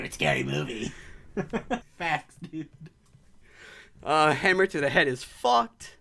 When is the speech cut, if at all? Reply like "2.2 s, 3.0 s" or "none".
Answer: 1.8 s